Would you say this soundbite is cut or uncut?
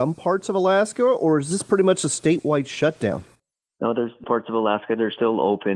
uncut